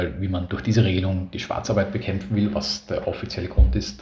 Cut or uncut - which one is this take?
uncut